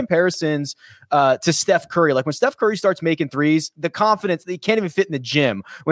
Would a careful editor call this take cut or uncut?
cut